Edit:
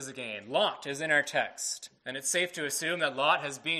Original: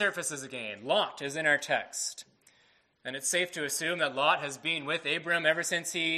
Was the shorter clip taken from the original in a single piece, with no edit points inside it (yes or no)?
no